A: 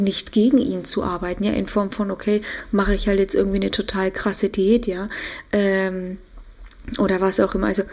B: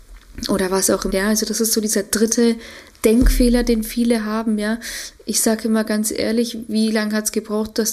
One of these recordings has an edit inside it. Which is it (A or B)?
B